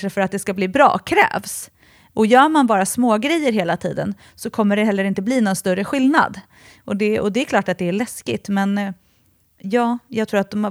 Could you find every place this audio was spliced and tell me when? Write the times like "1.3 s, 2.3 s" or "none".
none